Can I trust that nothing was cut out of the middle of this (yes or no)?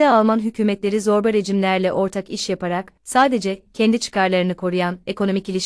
no